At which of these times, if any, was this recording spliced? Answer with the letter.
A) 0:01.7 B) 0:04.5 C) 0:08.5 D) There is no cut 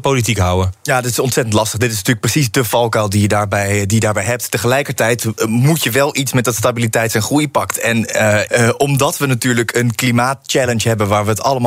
C